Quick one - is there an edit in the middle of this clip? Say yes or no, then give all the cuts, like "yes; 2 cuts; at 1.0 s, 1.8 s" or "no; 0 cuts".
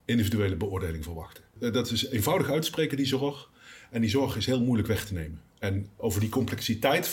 no; 0 cuts